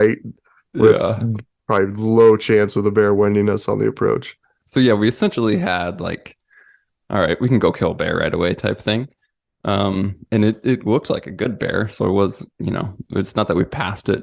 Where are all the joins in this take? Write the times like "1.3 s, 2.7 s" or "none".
none